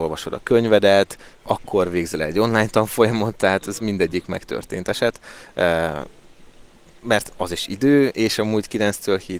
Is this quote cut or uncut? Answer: uncut